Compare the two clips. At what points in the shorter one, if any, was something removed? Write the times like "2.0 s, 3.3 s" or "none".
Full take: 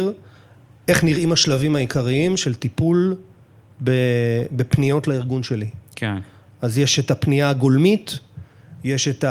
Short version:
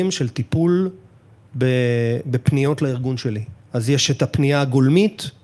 3.6 s